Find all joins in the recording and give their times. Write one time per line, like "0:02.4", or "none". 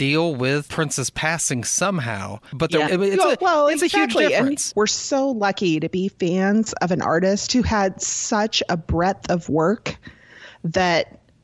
0:02.9
0:04.7